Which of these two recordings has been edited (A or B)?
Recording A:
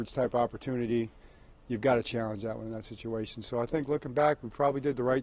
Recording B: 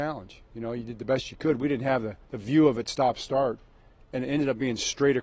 B